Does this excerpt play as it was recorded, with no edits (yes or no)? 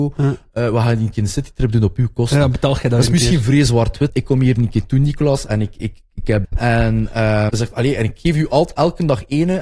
no